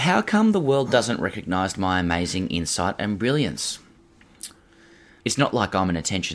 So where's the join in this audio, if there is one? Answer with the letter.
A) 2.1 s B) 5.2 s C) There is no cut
B